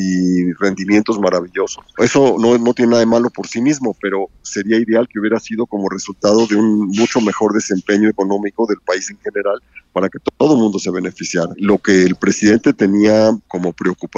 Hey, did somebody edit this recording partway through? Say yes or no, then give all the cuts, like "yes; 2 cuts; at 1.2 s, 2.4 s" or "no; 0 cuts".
yes; 1 cut; at 2.3 s